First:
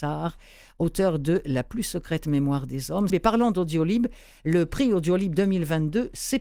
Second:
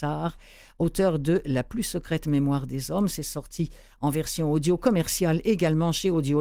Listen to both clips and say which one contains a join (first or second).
first